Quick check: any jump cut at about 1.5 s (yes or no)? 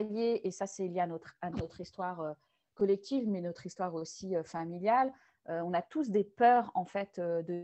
yes